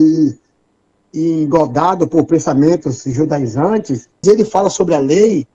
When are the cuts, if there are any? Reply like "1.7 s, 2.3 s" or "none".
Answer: 4.2 s